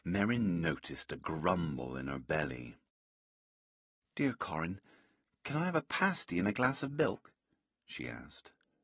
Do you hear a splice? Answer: no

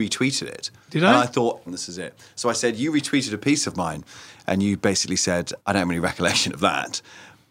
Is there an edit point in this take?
yes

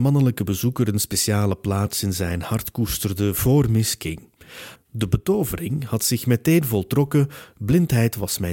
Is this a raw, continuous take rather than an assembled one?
no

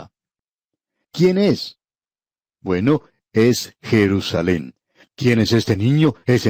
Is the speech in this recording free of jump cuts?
no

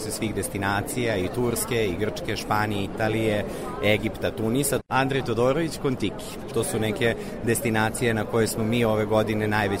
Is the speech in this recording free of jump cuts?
no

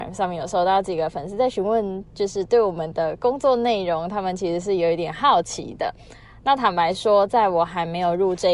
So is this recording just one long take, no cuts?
yes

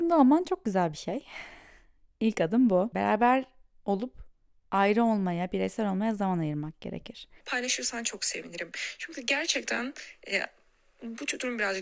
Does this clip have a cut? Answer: yes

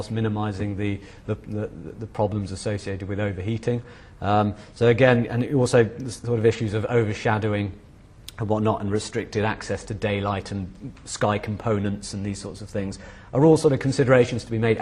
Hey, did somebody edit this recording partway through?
no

